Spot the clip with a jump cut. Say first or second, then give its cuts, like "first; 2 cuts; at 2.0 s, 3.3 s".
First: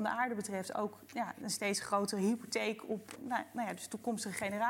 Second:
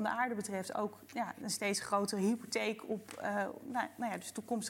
first; 1 cut; at 3.2 s